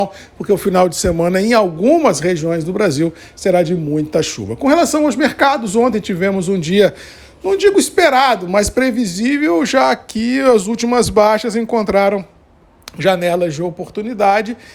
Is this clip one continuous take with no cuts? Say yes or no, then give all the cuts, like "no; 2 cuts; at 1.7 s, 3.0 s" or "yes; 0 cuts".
yes; 0 cuts